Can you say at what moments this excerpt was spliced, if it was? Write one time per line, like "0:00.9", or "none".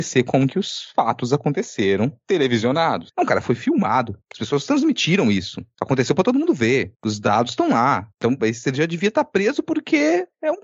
0:03.1
0:08.4